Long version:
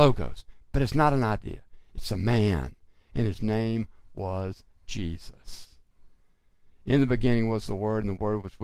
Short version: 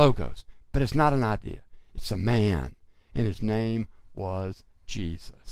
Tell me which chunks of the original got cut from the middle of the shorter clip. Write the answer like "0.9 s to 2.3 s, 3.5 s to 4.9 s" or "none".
none